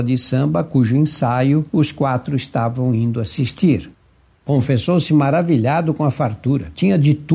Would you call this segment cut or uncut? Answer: uncut